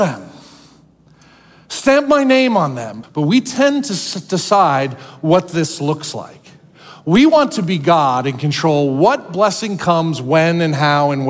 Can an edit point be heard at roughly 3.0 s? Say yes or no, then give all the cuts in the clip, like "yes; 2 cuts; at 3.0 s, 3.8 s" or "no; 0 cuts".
yes; 1 cut; at 3.0 s